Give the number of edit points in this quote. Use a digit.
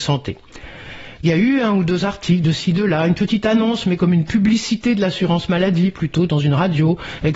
1